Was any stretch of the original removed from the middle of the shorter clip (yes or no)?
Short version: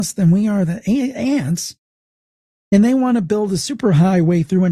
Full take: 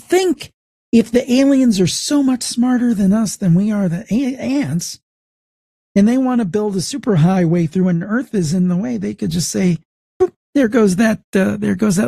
no